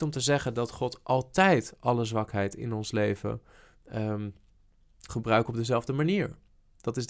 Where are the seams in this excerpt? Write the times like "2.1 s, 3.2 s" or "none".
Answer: 5.1 s